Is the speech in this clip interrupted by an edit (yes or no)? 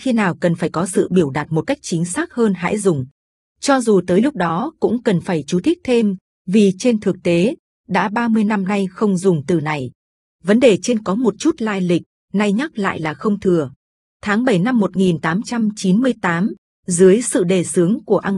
no